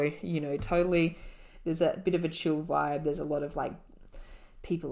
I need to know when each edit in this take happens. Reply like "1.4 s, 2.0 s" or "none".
none